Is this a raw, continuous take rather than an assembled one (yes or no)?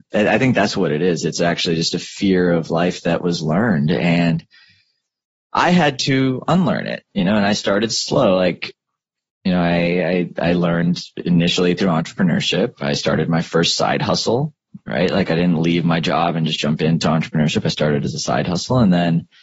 yes